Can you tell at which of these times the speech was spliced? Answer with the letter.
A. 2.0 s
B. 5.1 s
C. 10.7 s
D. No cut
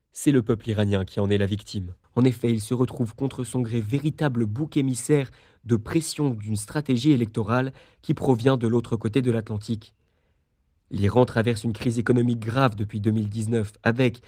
A